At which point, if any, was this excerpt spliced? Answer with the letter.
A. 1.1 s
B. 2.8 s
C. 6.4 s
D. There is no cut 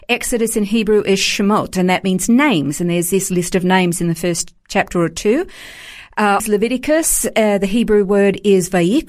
C